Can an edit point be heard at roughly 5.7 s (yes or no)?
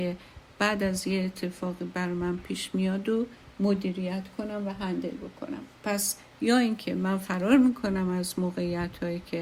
yes